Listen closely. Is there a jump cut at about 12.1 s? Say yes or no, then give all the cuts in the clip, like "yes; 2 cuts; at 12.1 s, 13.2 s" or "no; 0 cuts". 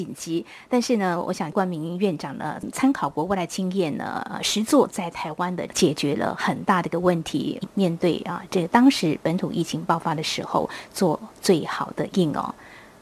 yes; 1 cut; at 12.1 s